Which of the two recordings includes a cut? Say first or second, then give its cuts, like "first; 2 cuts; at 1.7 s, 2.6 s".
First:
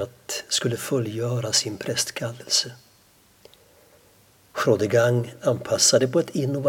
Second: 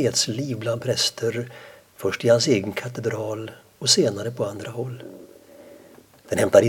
first; 1 cut; at 4.5 s